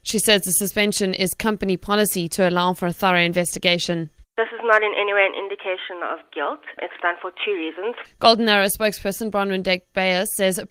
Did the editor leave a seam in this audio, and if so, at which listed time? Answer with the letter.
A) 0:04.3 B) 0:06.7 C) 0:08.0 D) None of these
C